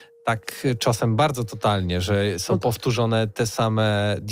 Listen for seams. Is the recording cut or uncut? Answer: uncut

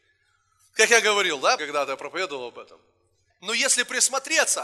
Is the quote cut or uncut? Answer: cut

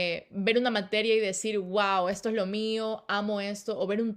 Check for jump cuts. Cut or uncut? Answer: uncut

